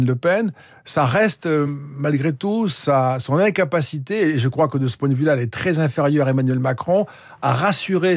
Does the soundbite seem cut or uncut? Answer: uncut